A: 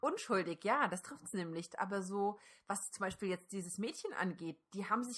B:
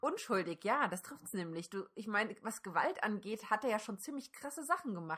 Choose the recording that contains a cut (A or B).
A